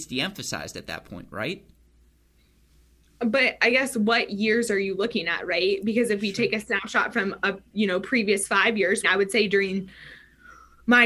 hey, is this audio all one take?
no; 1 cut; at 9.0 s

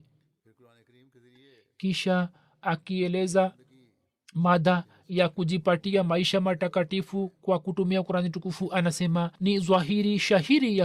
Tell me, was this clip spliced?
yes; 1 cut; at 9.4 s

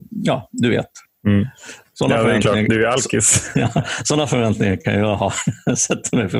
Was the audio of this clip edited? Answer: no; 0 cuts

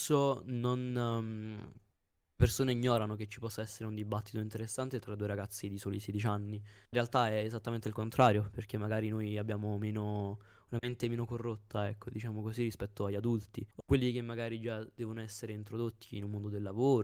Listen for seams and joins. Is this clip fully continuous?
no; 2 cuts; at 6.8 s, 13.7 s

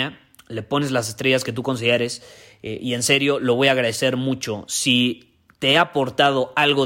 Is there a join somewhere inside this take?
no; 0 cuts

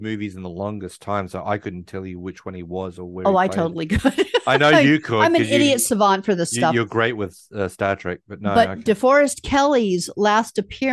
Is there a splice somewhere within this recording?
no; 0 cuts

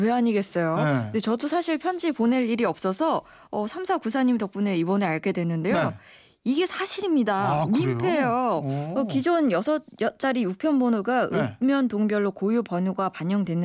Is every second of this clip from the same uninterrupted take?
yes; 0 cuts

